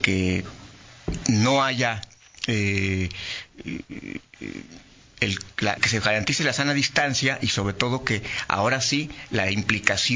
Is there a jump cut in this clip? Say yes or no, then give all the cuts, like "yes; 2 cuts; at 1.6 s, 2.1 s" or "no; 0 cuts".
yes; 1 cut; at 5.8 s